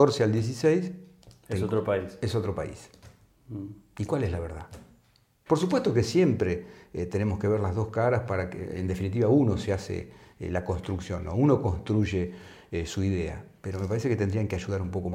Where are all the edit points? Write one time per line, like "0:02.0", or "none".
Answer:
0:05.5